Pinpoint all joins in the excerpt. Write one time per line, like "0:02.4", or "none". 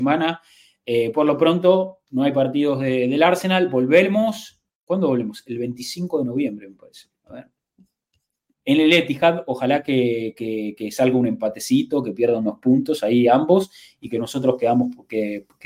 0:08.5